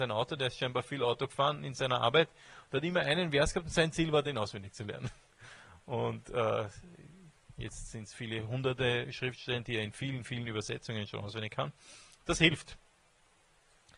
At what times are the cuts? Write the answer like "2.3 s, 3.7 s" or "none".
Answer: 8.1 s